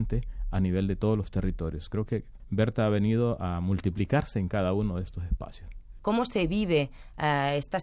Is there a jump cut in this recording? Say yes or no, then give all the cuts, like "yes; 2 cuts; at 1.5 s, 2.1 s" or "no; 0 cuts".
yes; 1 cut; at 6.0 s